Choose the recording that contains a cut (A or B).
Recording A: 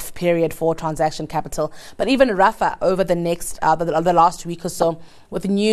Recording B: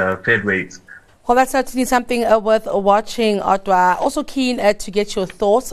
B